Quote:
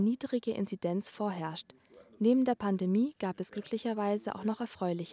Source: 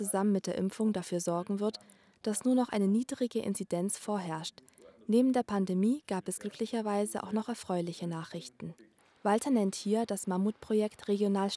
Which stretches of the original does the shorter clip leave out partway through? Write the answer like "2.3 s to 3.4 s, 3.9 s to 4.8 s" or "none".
none